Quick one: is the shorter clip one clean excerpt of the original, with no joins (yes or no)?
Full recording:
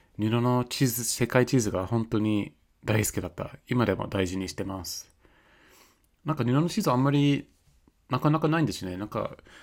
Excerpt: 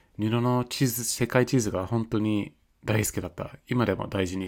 yes